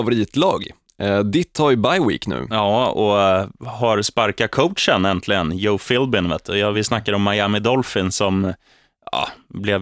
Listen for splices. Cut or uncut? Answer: uncut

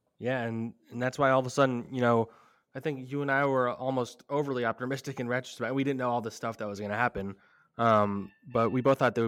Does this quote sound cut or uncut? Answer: uncut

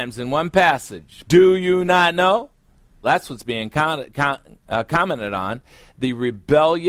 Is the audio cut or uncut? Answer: cut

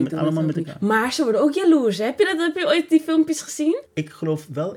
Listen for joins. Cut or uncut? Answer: cut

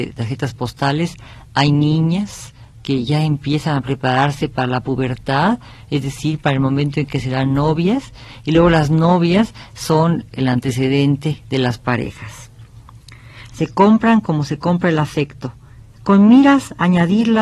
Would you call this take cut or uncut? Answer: cut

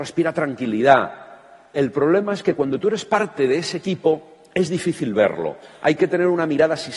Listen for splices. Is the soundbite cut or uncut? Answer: uncut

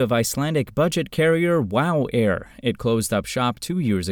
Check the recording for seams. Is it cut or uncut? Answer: uncut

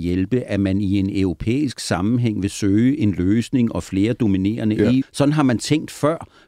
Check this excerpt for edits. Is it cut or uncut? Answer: cut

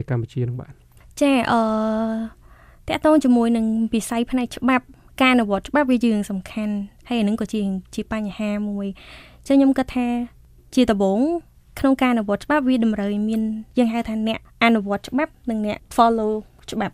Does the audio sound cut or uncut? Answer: uncut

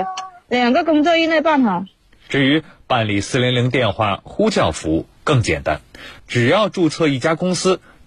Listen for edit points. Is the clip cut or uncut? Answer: cut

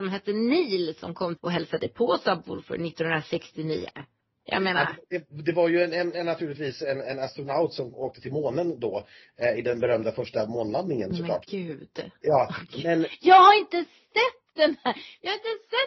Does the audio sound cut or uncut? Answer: uncut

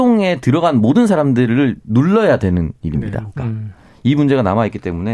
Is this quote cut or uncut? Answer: cut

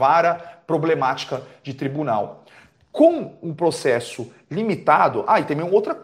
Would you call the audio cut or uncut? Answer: uncut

